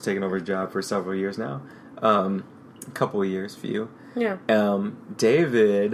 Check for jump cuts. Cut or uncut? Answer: uncut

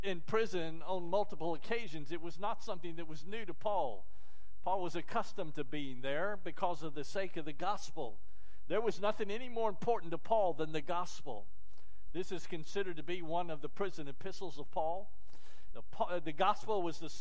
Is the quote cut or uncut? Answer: cut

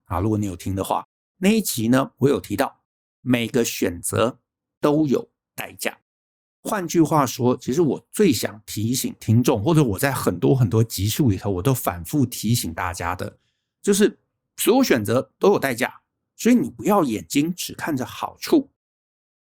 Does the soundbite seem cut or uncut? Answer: uncut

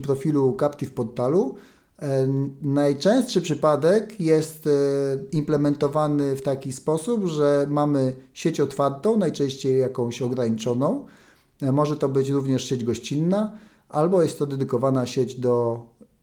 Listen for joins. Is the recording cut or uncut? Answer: uncut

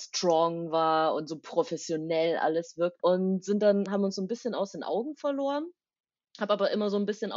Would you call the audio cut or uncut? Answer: cut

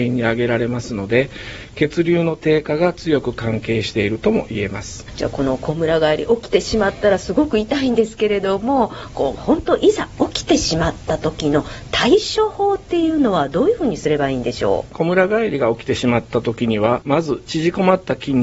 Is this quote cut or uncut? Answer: cut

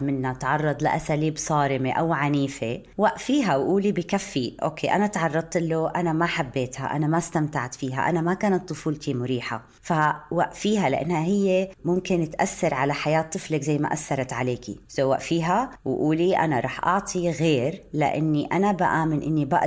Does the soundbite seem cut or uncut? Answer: uncut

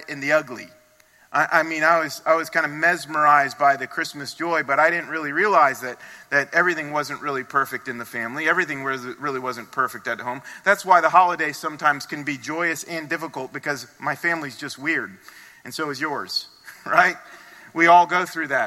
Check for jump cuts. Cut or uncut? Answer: uncut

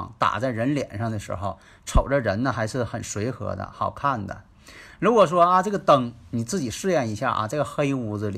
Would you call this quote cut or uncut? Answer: uncut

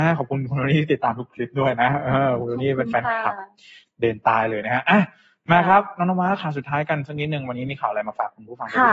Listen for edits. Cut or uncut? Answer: uncut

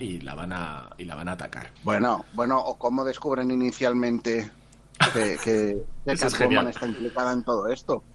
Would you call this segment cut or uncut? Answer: uncut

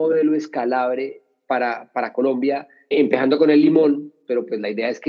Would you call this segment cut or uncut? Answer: cut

